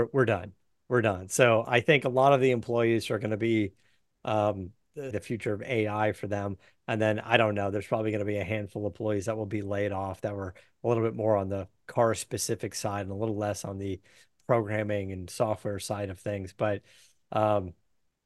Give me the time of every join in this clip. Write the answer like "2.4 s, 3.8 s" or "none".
5.1 s